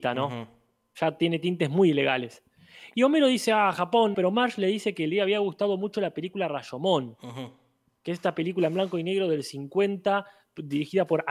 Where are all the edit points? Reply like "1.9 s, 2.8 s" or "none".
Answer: 4.1 s